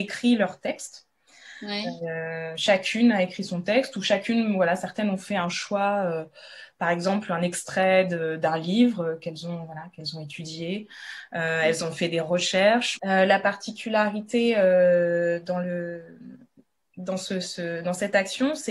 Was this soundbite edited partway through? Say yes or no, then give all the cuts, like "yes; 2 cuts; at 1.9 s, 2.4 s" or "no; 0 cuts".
yes; 1 cut; at 13.0 s